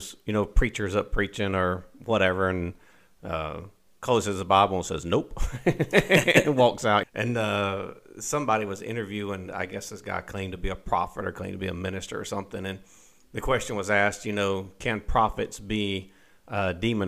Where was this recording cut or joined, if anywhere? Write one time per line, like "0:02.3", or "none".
0:07.0